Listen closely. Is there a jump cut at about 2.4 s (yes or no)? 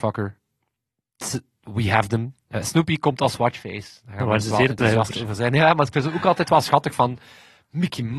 no